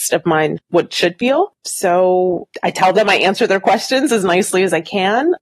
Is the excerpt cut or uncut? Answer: cut